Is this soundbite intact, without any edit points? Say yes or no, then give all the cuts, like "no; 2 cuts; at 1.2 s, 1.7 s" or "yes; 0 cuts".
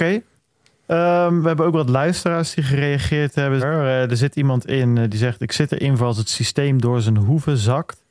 no; 1 cut; at 3.6 s